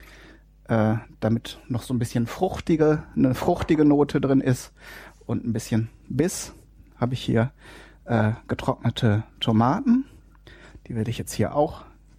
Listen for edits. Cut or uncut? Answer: uncut